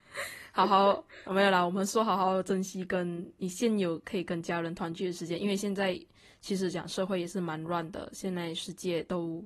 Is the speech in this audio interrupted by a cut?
no; 0 cuts

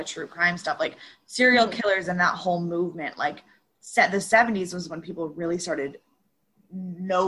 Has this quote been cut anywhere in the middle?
no; 0 cuts

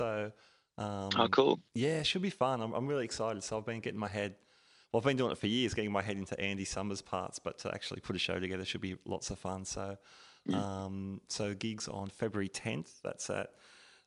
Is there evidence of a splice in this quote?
no; 0 cuts

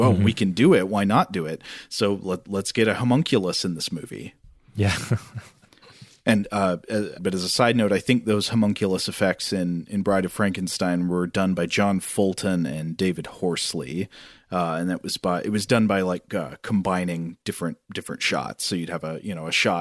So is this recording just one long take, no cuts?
no; 1 cut; at 7.2 s

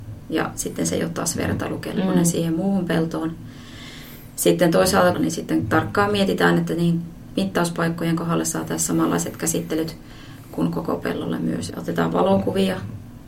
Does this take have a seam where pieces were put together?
yes; 2 cuts; at 5.1 s, 11.7 s

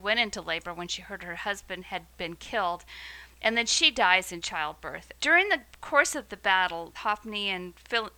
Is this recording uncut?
no; 2 cuts; at 5.2 s, 6.9 s

